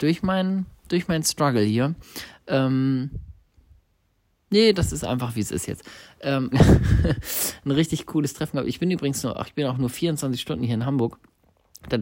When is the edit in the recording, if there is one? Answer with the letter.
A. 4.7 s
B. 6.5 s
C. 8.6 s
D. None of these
B